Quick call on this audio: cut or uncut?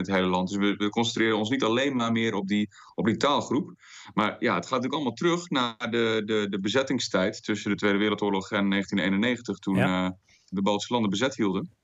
cut